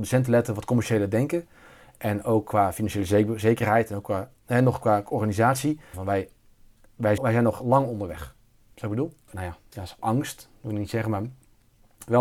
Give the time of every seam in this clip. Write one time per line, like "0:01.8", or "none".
0:05.9
0:07.2
0:09.3